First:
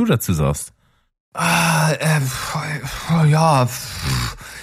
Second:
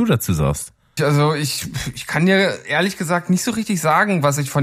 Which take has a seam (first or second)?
second